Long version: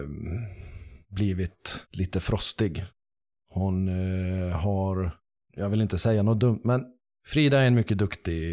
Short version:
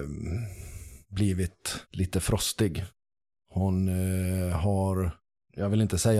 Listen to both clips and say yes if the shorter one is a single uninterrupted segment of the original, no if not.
yes